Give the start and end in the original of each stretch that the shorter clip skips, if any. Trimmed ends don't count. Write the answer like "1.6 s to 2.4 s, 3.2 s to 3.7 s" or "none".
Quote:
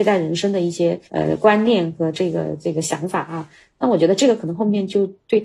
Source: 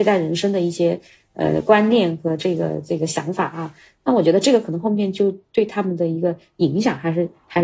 1.1 s to 1.3 s